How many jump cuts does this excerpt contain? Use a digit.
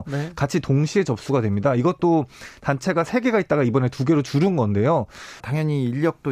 1